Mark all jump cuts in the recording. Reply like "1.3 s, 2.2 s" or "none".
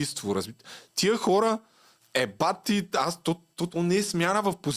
2.0 s, 3.7 s